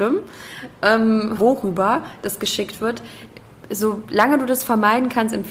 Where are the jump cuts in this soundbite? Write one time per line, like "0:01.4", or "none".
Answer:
0:01.4